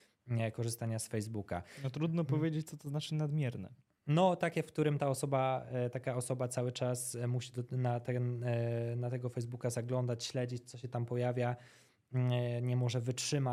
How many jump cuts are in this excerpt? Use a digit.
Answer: 0